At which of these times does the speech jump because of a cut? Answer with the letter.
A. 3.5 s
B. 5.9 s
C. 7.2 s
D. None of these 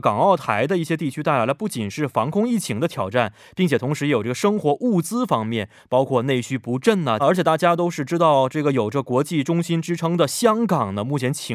C